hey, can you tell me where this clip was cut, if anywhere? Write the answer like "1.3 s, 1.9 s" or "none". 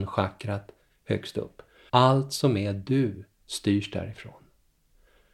1.9 s